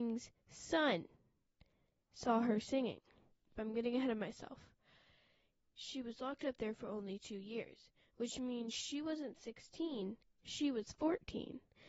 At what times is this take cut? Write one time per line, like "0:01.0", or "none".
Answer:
none